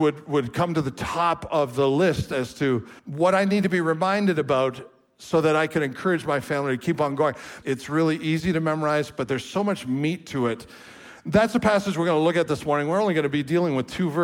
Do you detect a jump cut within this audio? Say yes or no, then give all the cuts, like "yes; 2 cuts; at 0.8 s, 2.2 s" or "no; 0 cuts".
yes; 2 cuts; at 3.0 s, 7.6 s